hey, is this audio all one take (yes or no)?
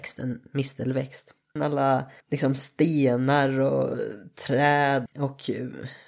no